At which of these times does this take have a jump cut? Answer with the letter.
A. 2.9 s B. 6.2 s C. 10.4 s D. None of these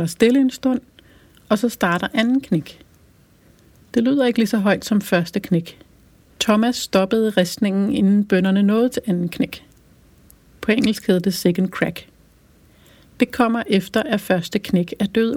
B